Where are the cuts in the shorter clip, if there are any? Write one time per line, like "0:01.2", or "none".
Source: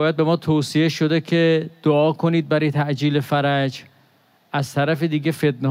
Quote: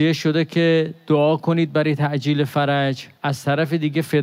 0:03.1